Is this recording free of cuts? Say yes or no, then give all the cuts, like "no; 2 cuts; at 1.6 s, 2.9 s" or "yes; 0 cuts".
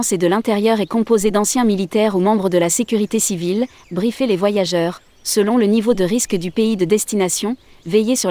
no; 1 cut; at 3.8 s